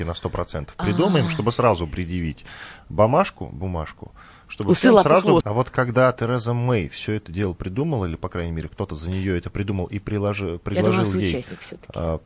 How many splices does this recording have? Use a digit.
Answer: 1